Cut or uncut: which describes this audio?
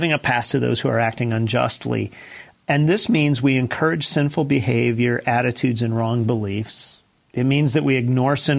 uncut